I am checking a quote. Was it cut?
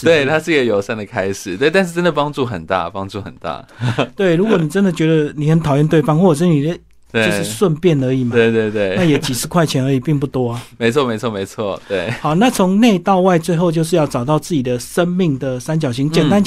yes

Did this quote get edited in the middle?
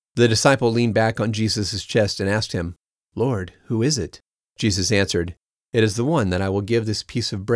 no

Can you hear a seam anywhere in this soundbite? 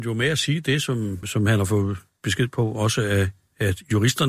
yes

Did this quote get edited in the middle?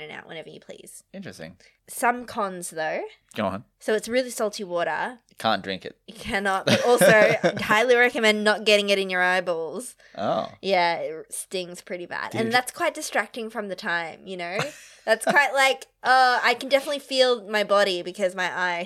no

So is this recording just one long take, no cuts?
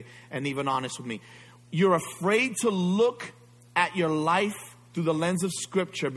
yes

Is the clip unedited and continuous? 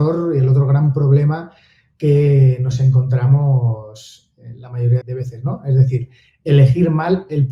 no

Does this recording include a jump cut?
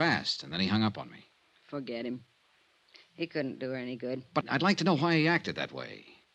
yes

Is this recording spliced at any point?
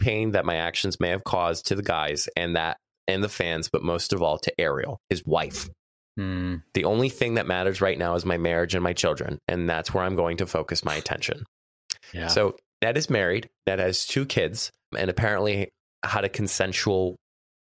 yes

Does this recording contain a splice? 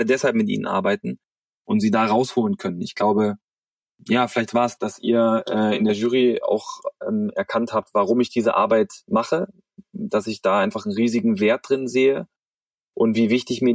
no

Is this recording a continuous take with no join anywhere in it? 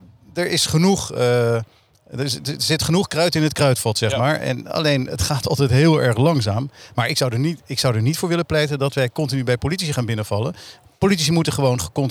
yes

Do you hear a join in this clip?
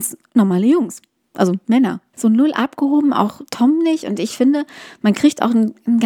yes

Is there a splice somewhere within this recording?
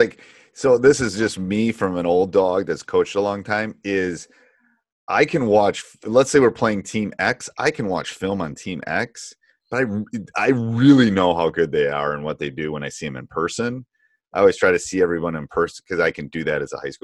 no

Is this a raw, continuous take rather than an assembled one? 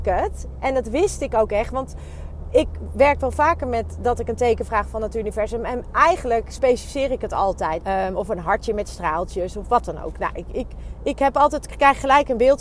no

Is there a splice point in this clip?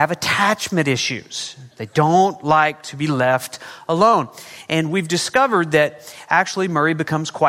no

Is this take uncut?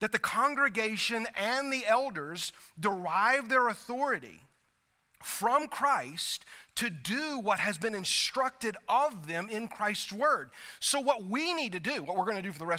yes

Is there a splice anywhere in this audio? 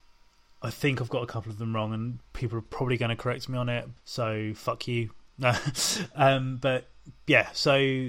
yes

